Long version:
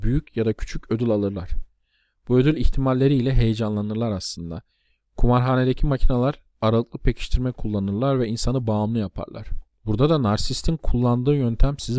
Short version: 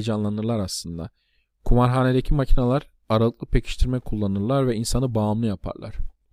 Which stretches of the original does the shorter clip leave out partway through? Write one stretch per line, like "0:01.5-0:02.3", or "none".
none